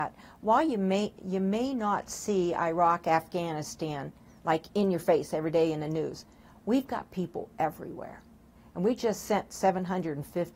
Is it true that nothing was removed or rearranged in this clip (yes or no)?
yes